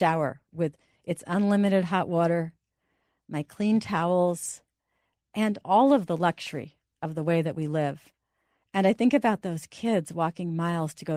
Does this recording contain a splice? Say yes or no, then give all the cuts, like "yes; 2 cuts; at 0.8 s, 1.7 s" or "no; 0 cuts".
no; 0 cuts